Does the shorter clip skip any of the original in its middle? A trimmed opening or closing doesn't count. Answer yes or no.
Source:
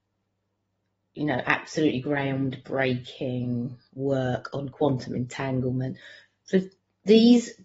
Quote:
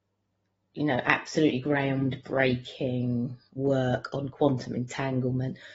no